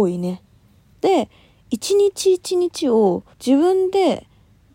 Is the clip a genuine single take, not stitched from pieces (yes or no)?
no